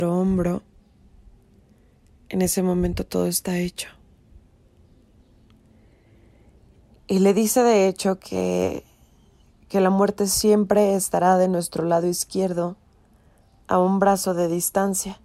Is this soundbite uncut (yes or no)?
no